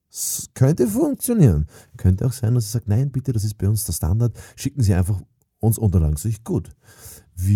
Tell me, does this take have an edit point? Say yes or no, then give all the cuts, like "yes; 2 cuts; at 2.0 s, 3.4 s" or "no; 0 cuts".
no; 0 cuts